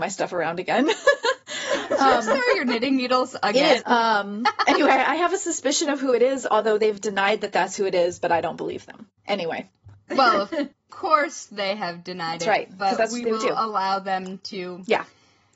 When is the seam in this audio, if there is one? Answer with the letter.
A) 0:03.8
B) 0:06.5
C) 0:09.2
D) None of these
A